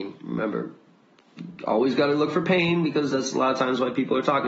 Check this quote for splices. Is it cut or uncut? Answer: uncut